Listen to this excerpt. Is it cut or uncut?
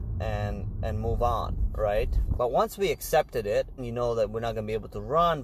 cut